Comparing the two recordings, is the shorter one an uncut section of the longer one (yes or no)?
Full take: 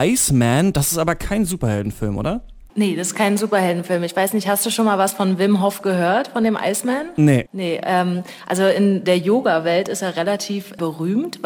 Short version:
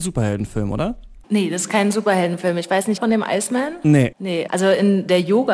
no